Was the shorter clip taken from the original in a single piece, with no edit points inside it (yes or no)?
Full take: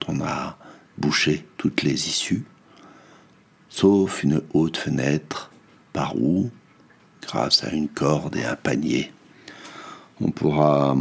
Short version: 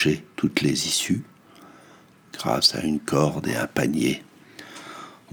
no